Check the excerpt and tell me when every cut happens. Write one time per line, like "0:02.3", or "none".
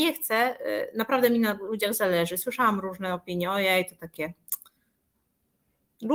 none